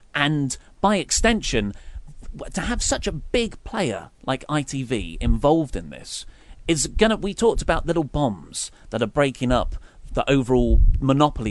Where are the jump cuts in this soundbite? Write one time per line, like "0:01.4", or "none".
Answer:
0:10.1